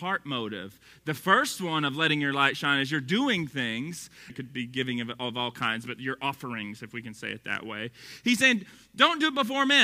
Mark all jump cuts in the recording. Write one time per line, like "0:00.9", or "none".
0:04.3